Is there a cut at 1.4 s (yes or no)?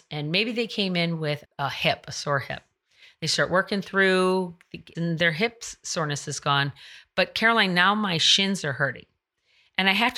yes